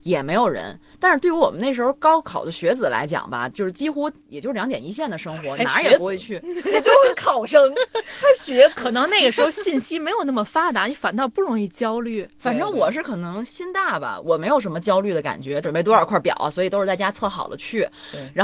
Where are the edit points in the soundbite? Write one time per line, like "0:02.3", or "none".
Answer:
0:14.2
0:15.6